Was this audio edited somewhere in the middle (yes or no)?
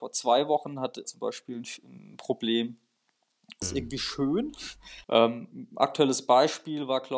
yes